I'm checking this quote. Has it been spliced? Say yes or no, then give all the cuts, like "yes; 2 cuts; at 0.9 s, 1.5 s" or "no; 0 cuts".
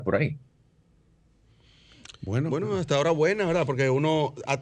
no; 0 cuts